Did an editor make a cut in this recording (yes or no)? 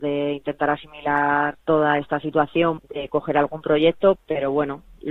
yes